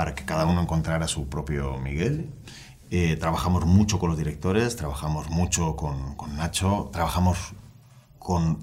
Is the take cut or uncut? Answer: uncut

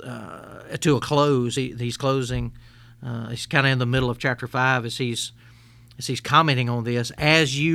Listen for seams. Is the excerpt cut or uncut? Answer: uncut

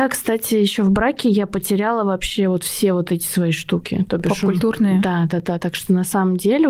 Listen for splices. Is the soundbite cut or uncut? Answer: uncut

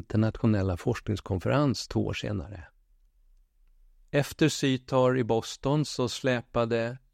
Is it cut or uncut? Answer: uncut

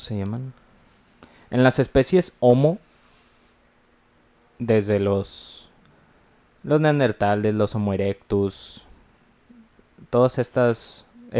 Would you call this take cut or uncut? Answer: uncut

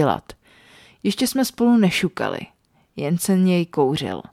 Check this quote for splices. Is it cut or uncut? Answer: uncut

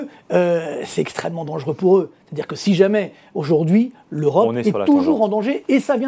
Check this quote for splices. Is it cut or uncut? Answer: uncut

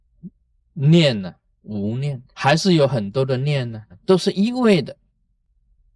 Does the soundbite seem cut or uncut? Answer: cut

